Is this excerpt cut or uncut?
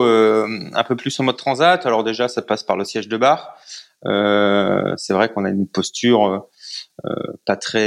uncut